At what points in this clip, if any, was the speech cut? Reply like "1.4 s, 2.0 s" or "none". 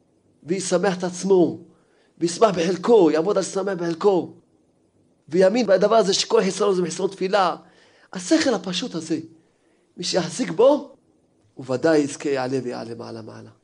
none